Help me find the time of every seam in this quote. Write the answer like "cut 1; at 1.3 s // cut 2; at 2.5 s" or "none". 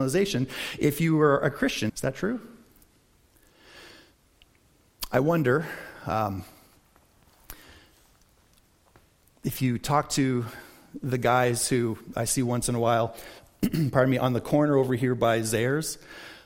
cut 1; at 1.9 s